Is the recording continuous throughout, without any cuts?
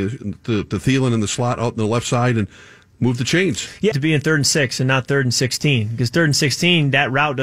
no; 1 cut; at 3.9 s

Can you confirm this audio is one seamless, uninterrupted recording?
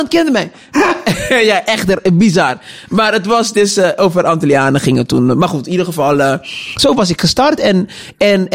yes; 0 cuts

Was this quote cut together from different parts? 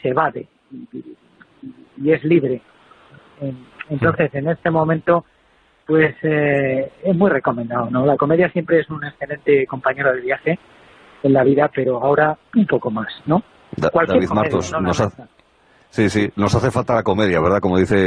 yes; 1 cut; at 12.5 s

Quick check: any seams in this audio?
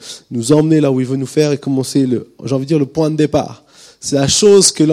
no; 0 cuts

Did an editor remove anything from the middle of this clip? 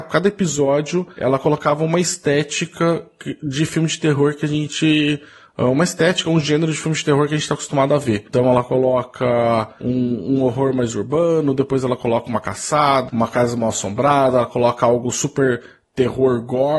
yes; 1 cut; at 13.1 s

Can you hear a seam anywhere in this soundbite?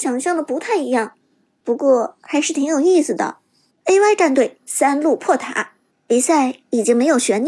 yes; 2 cuts; at 3.7 s, 5.9 s

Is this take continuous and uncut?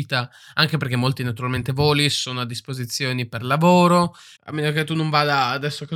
no; 1 cut; at 4.4 s

